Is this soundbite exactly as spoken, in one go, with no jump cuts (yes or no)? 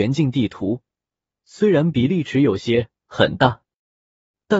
yes